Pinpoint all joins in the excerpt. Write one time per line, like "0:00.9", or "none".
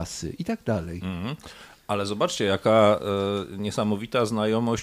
none